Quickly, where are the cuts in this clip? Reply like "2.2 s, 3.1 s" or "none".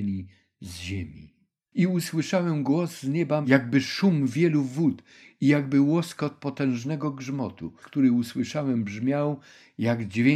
1.7 s, 7.8 s